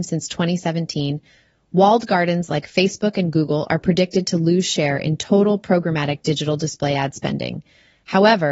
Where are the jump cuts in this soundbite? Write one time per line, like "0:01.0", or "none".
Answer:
none